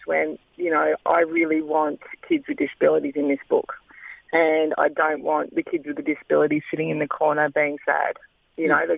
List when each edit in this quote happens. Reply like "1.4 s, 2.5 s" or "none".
none